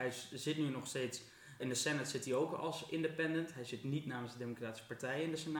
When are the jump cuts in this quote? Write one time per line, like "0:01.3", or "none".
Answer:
0:01.6

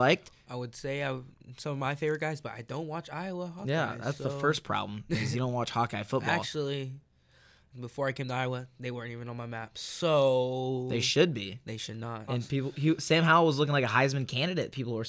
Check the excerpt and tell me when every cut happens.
0:07.7
0:12.3

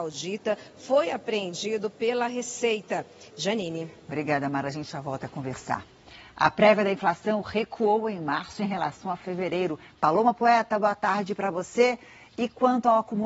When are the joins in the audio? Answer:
0:03.3
0:09.9

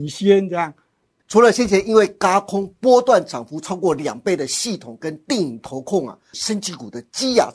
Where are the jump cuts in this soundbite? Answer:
0:01.2
0:06.3

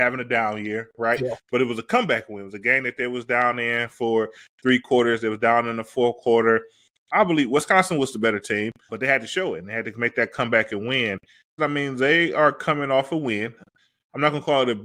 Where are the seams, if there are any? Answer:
0:08.9
0:11.6

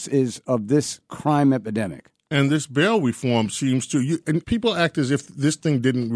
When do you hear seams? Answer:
0:04.4

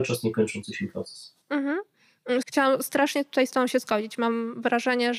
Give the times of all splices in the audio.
0:01.4
0:02.4

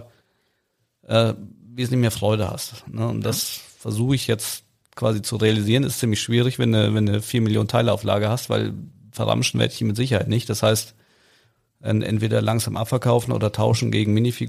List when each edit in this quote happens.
none

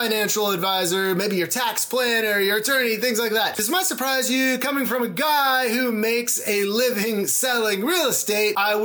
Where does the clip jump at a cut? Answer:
0:03.5

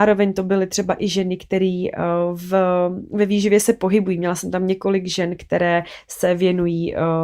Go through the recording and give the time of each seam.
none

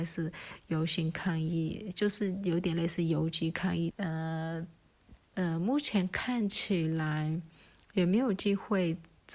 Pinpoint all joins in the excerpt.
0:03.9
0:05.3

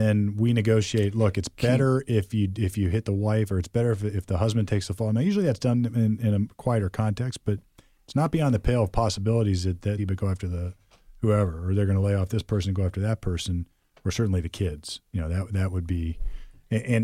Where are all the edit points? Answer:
0:10.0

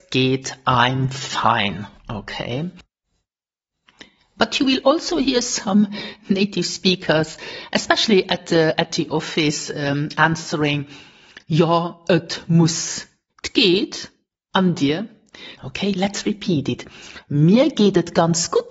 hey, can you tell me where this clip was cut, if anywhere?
0:13.3
0:15.6

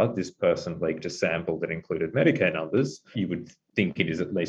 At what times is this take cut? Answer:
0:03.1

